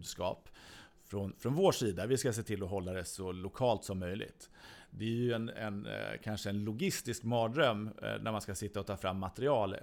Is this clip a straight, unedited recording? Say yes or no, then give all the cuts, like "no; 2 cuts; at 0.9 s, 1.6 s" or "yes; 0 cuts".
yes; 0 cuts